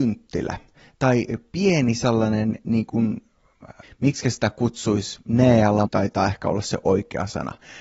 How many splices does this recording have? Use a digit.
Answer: 2